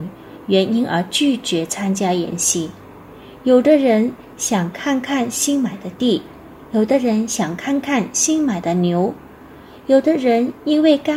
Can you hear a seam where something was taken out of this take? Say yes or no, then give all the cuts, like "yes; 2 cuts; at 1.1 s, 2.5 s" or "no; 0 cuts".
no; 0 cuts